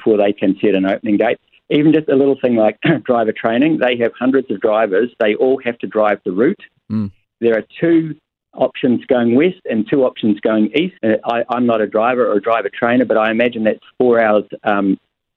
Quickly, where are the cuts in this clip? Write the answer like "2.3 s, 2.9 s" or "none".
11.0 s